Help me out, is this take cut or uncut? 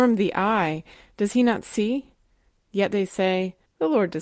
cut